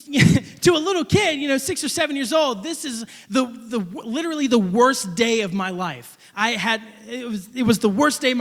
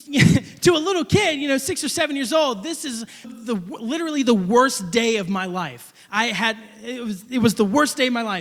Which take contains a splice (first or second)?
second